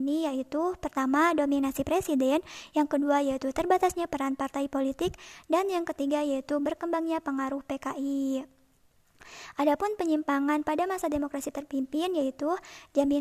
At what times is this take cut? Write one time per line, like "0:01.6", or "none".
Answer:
none